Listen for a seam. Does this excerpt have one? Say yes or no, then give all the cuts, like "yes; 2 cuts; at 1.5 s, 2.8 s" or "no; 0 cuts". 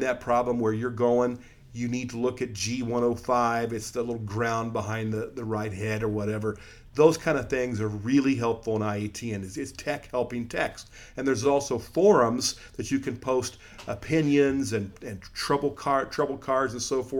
no; 0 cuts